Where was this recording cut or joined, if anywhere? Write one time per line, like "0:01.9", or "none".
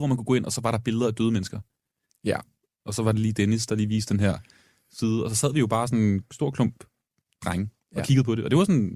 0:02.8